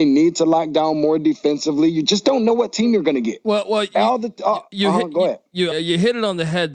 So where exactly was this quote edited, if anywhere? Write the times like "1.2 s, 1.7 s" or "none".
5.7 s